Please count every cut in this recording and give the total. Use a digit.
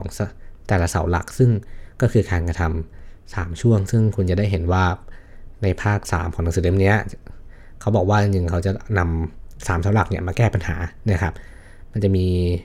0